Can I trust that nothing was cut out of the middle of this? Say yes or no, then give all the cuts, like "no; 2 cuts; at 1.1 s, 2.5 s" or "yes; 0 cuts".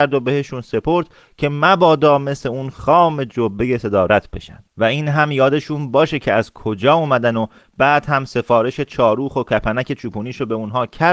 no; 1 cut; at 4.7 s